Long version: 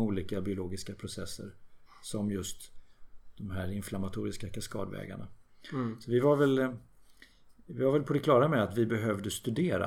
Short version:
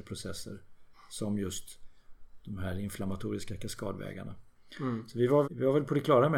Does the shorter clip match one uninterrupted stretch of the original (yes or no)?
no